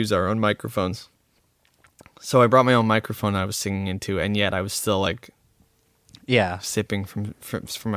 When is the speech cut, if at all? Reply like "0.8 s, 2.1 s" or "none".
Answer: none